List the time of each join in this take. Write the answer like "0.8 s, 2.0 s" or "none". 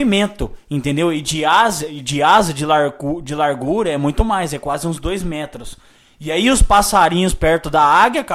none

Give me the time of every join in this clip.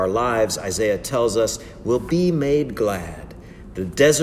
none

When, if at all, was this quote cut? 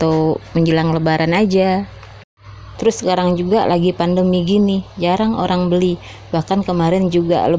2.7 s

